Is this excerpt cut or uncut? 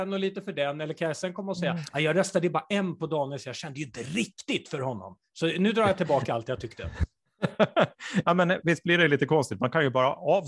uncut